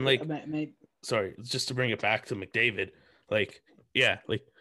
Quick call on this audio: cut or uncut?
cut